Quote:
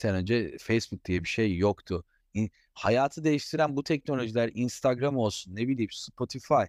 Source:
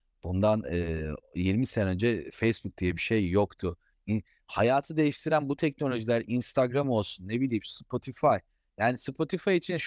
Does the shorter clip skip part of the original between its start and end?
no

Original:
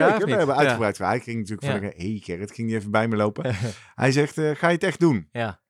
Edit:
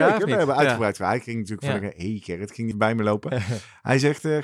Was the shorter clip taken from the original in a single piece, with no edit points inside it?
no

